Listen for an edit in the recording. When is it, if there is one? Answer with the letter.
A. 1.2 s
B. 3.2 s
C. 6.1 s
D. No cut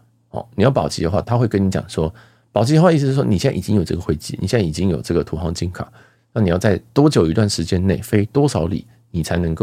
A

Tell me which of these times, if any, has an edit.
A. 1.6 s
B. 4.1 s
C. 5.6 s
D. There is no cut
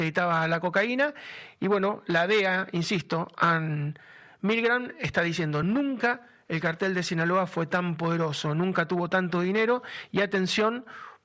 D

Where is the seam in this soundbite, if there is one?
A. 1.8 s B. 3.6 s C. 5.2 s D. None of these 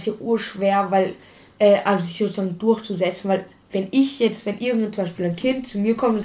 D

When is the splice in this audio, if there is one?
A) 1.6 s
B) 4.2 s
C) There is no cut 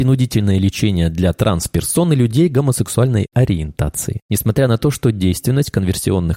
C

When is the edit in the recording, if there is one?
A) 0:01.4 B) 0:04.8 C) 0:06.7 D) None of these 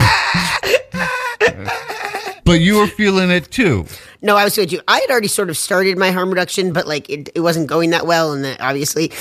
D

